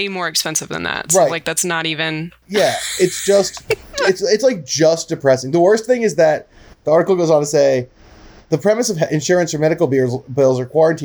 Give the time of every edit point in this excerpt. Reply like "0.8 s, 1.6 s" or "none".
none